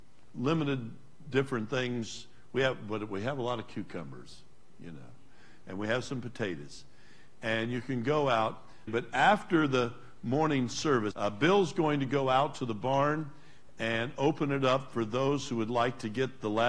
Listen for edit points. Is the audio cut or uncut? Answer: cut